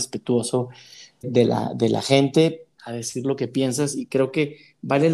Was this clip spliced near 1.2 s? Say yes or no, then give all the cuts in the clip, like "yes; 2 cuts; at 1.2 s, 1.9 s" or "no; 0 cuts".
yes; 2 cuts; at 1.2 s, 2.8 s